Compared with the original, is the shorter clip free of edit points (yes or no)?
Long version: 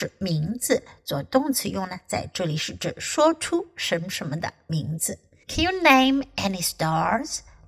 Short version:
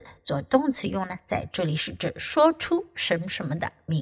yes